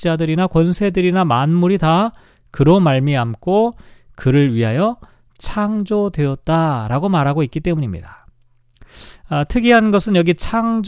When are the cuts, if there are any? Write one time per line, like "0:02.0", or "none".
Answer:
none

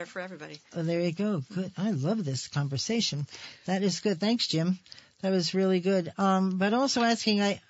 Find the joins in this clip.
none

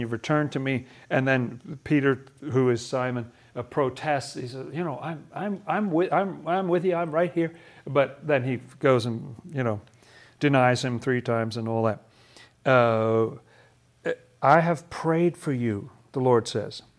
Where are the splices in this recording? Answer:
none

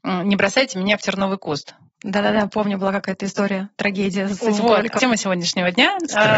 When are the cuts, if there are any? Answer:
0:05.0

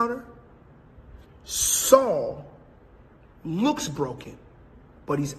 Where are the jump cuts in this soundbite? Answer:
none

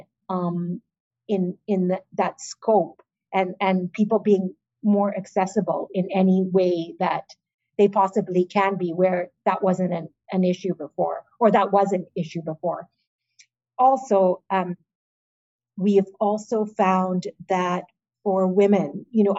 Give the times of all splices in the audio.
none

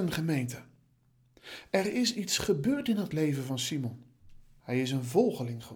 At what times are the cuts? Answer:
0:04.6

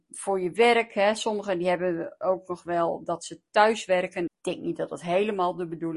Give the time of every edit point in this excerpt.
0:04.3

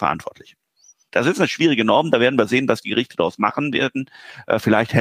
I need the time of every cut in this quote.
0:01.1

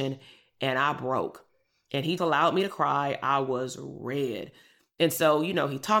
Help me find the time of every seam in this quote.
0:02.2

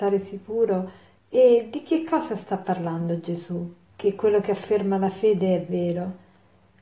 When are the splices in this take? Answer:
0:01.2
0:03.9

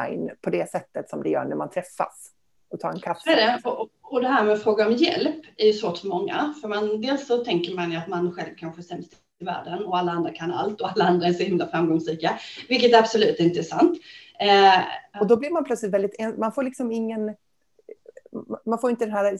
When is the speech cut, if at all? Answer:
0:15.1

